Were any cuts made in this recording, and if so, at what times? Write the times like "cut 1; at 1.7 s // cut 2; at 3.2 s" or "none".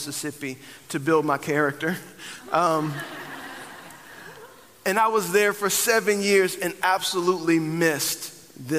none